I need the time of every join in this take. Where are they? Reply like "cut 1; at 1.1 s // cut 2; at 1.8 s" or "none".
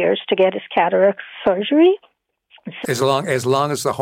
cut 1; at 2.8 s